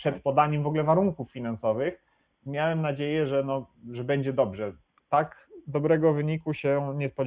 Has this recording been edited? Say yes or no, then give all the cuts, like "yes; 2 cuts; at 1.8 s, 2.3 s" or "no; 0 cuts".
no; 0 cuts